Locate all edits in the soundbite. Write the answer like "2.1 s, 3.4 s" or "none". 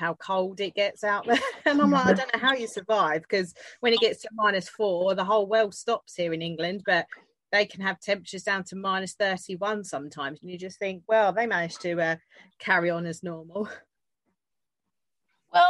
none

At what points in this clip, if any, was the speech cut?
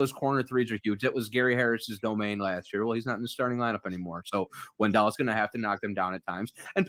none

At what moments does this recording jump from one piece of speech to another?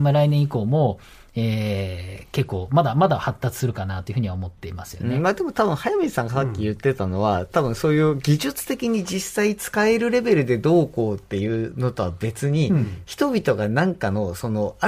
none

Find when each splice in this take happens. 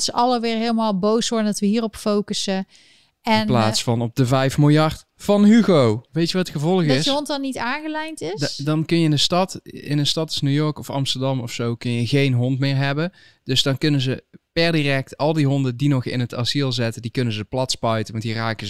6.1 s

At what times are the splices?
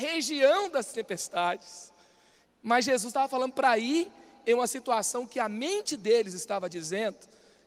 2.4 s

